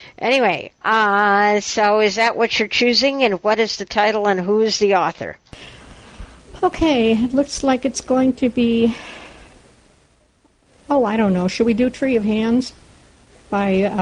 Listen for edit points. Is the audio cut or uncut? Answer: uncut